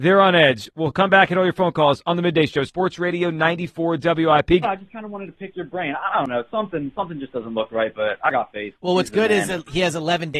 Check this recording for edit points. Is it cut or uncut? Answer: cut